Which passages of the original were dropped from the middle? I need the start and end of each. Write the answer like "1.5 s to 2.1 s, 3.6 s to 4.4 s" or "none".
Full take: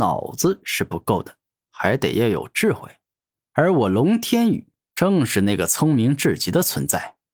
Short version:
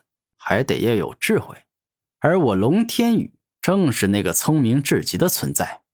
none